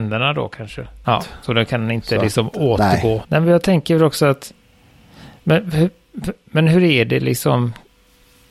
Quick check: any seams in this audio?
yes; 2 cuts; at 1.0 s, 3.2 s

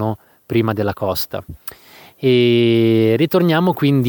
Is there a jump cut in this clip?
no; 0 cuts

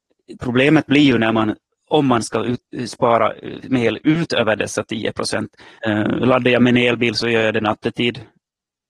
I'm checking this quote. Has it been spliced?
yes; 1 cut; at 5.8 s

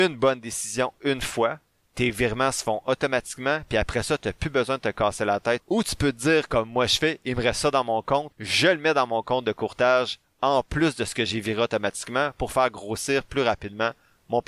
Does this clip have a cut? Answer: yes; 1 cut; at 5.6 s

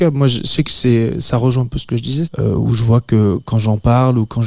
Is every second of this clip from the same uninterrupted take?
no; 1 cut; at 2.3 s

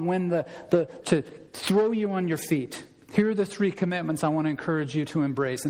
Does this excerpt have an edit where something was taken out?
yes; 1 cut; at 1.0 s

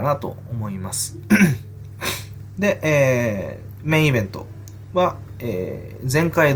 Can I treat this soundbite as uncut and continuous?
yes; 0 cuts

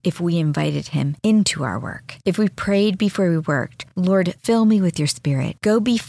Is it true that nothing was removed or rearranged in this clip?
yes; 0 cuts

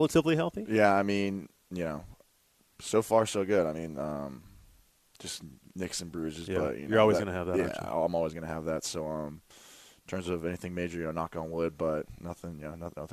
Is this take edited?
no; 0 cuts

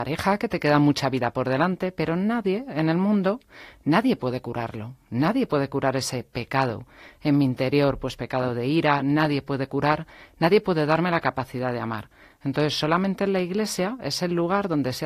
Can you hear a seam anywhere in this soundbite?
no; 0 cuts

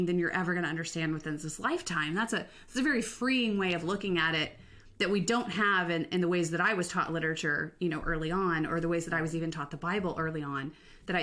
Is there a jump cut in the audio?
no; 0 cuts

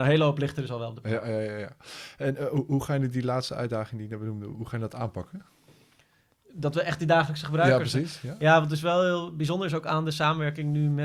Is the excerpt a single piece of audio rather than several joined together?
yes; 0 cuts

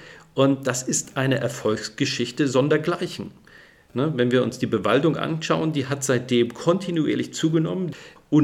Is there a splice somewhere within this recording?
no; 0 cuts

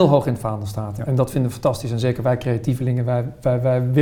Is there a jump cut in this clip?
no; 0 cuts

